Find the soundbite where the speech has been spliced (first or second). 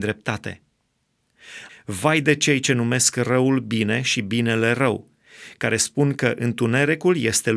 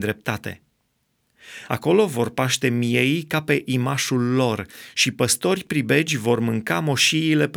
first